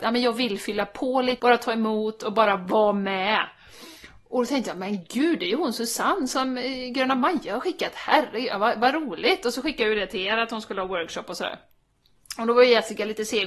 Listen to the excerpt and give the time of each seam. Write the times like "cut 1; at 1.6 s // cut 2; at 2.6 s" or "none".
cut 1; at 1.4 s